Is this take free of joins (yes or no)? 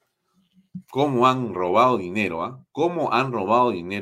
yes